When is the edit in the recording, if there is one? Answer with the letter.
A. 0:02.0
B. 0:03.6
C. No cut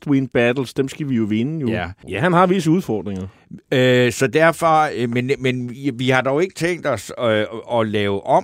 A